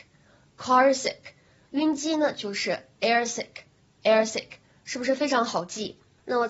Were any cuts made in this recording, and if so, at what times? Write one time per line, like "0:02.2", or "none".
none